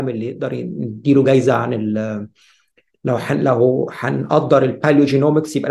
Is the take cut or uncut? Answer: uncut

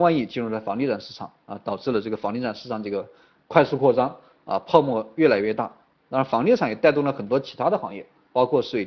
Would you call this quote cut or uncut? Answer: uncut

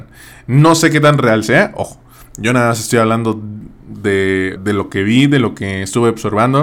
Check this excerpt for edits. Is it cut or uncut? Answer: cut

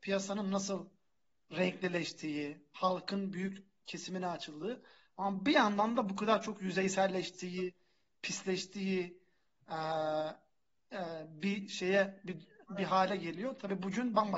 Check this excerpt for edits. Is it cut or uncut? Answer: uncut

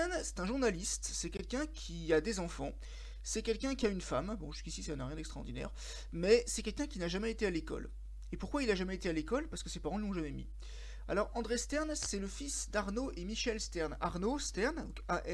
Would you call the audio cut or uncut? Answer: uncut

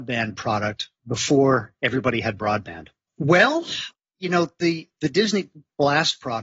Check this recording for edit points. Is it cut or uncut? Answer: cut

